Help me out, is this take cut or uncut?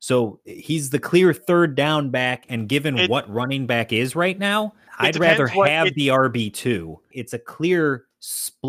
cut